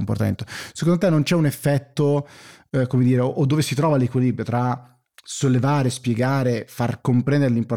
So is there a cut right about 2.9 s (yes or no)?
no